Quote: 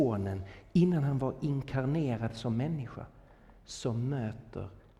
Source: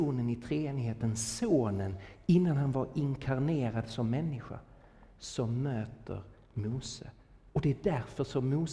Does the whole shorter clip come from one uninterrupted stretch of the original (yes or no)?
yes